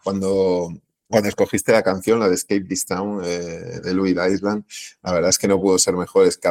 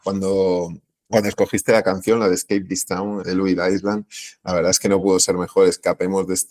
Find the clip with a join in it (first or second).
second